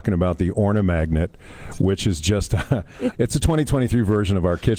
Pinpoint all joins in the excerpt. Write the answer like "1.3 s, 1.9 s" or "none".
3.1 s